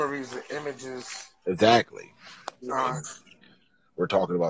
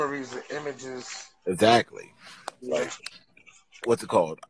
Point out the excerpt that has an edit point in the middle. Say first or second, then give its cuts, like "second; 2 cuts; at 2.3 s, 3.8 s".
first; 1 cut; at 2.7 s